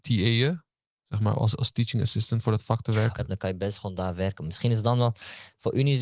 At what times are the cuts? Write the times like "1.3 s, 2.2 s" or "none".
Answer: 3.2 s

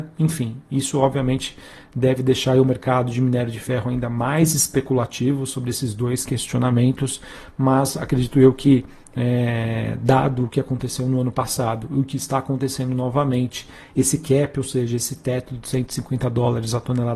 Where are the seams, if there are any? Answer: none

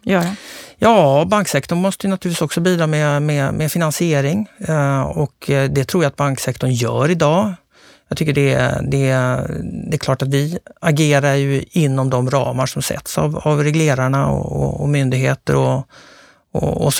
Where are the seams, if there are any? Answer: none

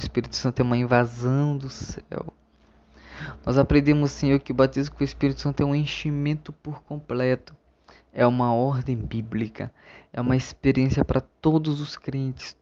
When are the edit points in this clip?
none

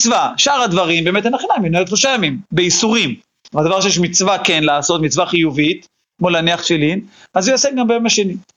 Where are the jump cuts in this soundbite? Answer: 3.5 s

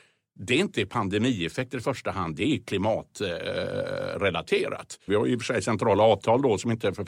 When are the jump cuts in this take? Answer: 5.1 s

